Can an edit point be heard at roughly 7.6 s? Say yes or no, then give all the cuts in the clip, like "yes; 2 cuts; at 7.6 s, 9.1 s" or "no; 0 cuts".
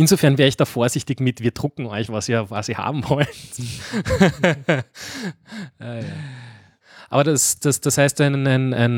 no; 0 cuts